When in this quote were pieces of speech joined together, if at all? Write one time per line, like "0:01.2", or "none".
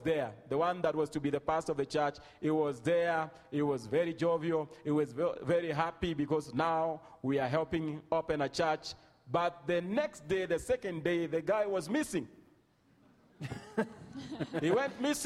none

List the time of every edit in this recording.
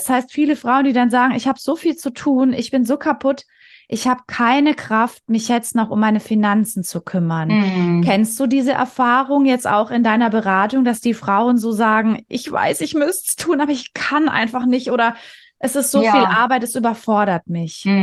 none

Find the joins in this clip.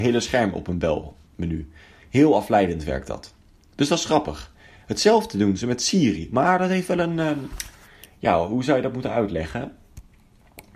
none

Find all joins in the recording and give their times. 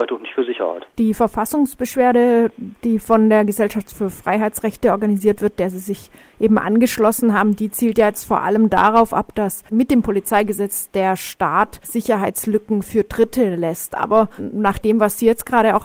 none

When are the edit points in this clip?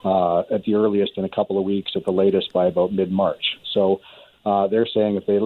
none

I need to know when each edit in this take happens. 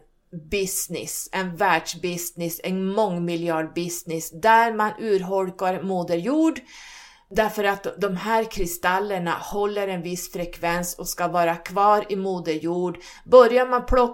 none

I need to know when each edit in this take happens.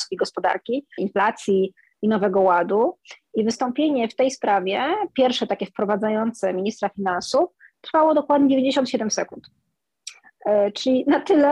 0:01.0

